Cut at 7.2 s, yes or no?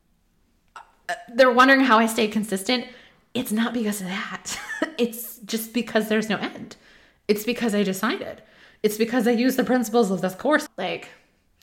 no